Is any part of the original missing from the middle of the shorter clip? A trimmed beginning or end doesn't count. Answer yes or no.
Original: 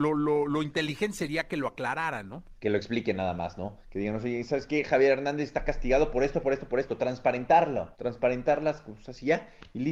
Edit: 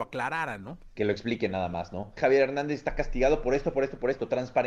yes